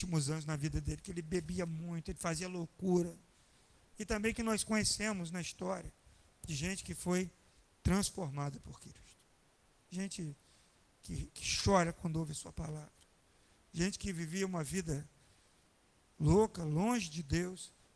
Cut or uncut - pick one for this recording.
cut